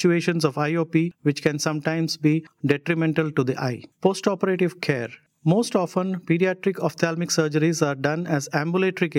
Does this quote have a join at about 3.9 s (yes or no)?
yes